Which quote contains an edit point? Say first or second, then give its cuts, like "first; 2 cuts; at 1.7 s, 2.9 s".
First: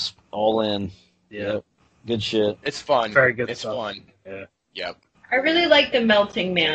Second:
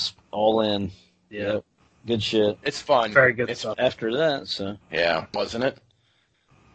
second; 2 cuts; at 3.7 s, 5.3 s